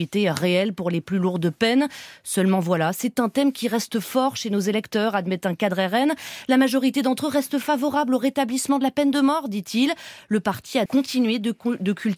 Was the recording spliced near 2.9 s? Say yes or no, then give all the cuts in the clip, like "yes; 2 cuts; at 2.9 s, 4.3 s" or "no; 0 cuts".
no; 1 cut; at 10.9 s